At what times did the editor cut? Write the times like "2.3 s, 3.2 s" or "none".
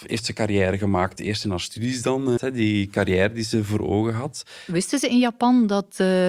2.4 s